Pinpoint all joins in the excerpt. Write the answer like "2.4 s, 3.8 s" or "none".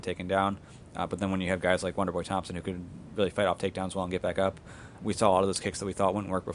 5.0 s